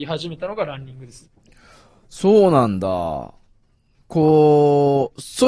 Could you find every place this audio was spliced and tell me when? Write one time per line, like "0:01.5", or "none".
none